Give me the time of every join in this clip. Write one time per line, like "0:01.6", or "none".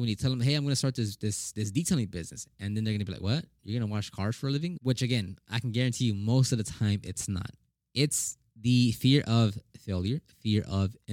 0:04.8